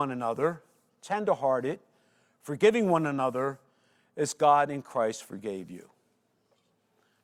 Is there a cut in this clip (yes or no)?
no